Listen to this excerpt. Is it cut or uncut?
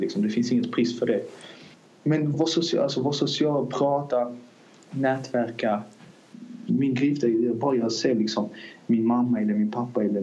cut